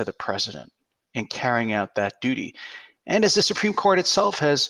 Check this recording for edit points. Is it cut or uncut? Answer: uncut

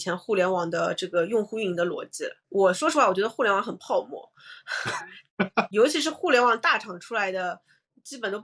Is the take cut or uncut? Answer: cut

